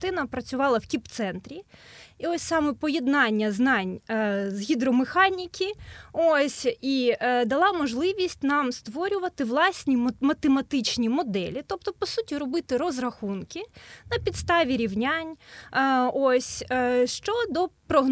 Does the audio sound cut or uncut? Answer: uncut